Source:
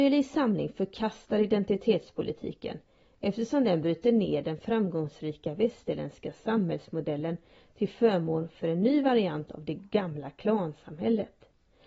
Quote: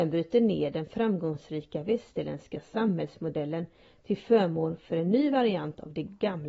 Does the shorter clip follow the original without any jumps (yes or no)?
yes